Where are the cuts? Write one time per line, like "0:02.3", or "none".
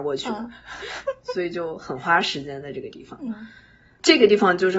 none